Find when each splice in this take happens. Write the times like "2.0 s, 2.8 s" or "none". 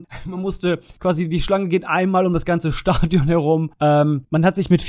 none